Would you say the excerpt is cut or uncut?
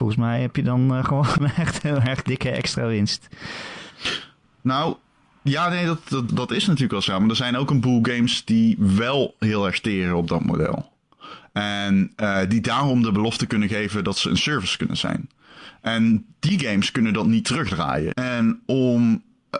cut